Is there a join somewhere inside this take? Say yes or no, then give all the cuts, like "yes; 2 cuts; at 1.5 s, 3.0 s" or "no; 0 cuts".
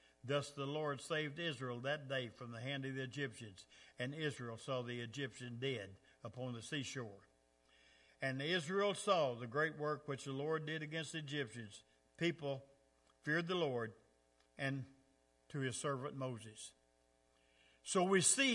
yes; 1 cut; at 14.4 s